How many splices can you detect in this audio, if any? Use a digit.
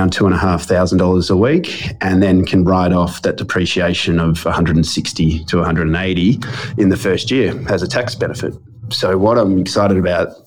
0